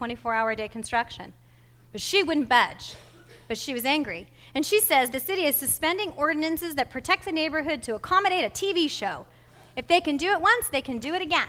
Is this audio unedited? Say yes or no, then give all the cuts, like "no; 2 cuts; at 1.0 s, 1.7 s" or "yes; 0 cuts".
no; 1 cut; at 5.1 s